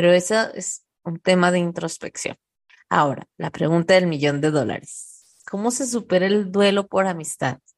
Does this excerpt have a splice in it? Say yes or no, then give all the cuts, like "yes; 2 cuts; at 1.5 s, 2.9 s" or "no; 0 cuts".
no; 0 cuts